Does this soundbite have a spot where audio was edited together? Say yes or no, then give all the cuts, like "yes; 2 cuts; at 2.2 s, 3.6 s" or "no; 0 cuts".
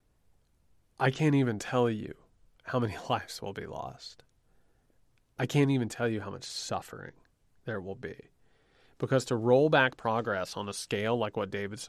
no; 0 cuts